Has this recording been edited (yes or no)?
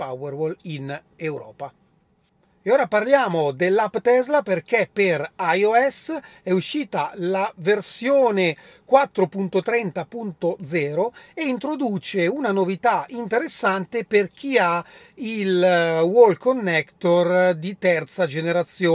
no